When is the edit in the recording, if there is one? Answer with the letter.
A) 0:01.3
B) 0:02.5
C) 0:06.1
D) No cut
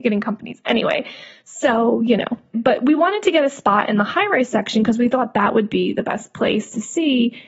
B